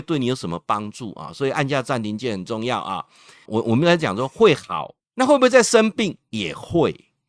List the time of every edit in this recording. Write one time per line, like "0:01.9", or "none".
0:03.4
0:05.0